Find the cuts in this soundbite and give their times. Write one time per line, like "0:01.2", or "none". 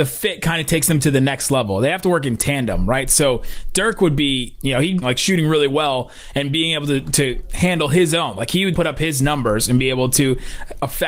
0:05.0
0:08.7

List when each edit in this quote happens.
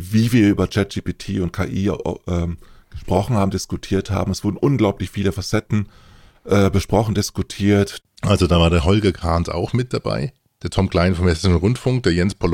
0:08.0

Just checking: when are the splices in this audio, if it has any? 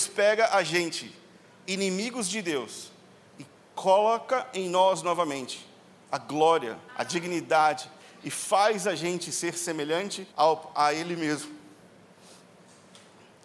0:06.9
0:10.3

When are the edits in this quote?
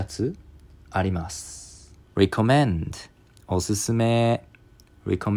0:02.0

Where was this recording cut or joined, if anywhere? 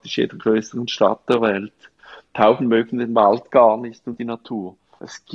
none

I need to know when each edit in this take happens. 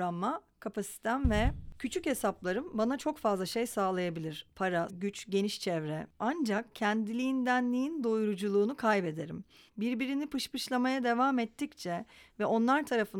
0:04.9
0:09.7

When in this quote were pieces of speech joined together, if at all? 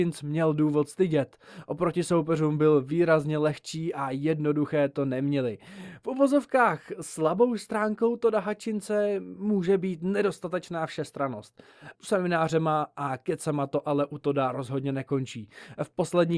0:11.9

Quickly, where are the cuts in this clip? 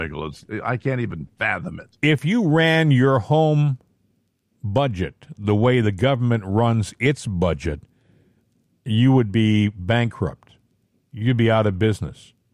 none

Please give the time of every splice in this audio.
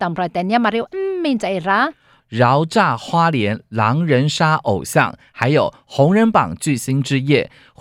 0:02.2

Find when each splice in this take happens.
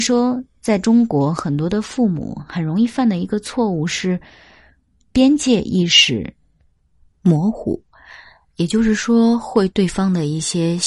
0:09.7

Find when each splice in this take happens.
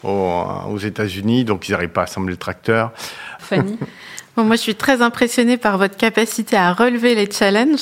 0:03.4

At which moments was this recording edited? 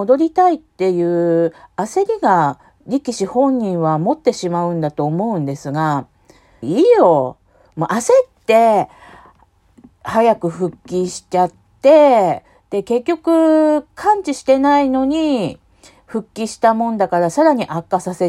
0:06.6

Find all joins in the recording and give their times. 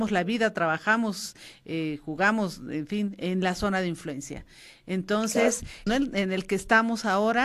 0:05.9

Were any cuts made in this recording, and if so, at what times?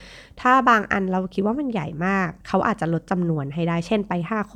0:02.4

